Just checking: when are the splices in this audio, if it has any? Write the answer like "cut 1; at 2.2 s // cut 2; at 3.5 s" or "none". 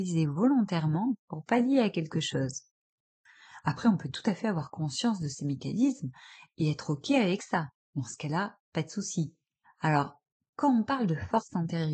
cut 1; at 9.6 s